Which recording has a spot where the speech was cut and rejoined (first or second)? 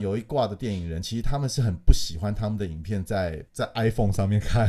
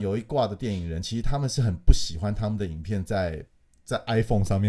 first